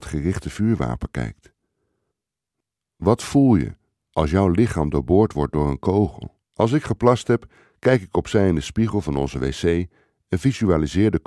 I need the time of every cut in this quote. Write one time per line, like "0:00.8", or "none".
0:06.4